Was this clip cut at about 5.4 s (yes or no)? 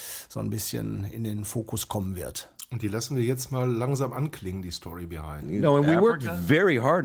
yes